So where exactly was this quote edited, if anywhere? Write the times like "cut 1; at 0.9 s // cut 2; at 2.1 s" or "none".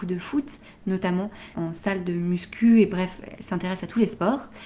cut 1; at 1.5 s